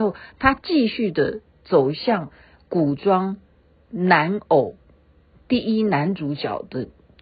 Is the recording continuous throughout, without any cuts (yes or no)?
yes